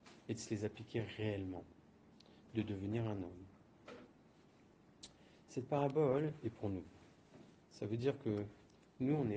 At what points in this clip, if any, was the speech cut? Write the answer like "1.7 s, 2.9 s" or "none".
none